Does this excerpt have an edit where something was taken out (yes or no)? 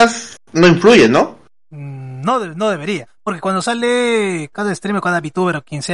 yes